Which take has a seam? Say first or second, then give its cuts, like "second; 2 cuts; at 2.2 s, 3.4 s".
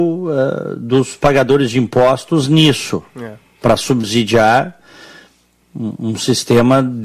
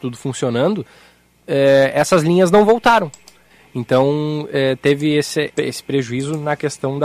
second; 1 cut; at 5.5 s